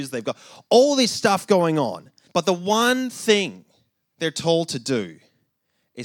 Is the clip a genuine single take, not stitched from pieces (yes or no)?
no